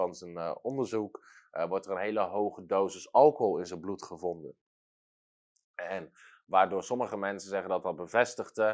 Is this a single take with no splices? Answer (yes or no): yes